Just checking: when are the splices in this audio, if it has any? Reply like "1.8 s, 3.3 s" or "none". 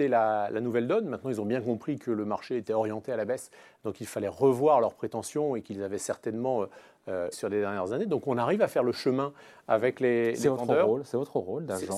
7.3 s